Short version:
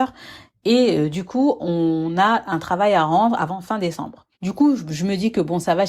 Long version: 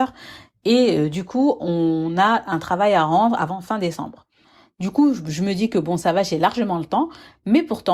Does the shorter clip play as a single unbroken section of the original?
no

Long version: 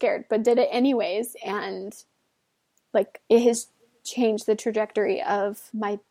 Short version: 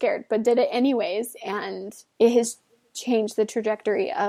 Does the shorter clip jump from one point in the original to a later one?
yes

